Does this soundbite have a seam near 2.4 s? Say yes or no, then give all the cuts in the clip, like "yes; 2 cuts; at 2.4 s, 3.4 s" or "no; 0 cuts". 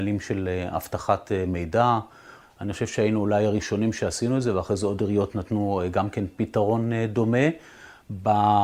yes; 1 cut; at 2.4 s